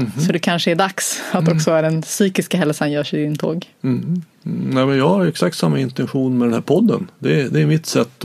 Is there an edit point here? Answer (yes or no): yes